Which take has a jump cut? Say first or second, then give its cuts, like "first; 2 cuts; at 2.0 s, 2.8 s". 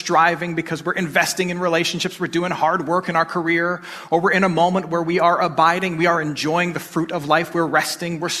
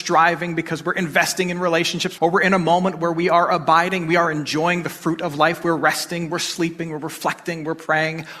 second; 1 cut; at 2.2 s